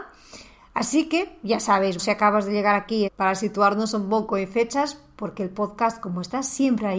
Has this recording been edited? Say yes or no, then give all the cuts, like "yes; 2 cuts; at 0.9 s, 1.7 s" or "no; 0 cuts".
yes; 2 cuts; at 2.0 s, 3.1 s